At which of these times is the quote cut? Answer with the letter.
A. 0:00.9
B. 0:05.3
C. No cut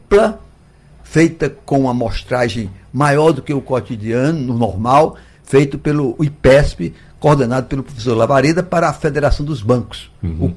C